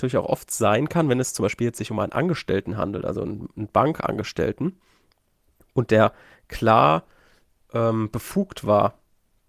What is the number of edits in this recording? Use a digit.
0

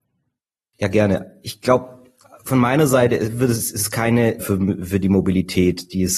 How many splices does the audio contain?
1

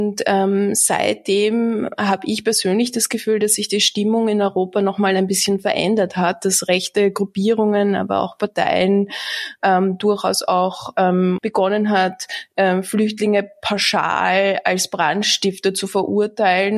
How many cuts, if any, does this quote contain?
1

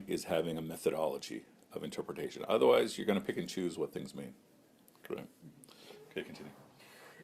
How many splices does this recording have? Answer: 0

